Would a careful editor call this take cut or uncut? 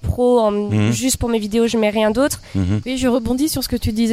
cut